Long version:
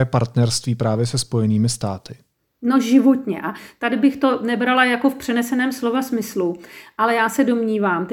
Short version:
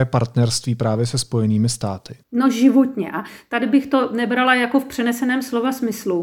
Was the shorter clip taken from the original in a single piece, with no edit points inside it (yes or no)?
no